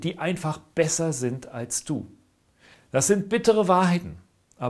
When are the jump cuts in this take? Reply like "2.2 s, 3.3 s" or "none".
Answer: 2.7 s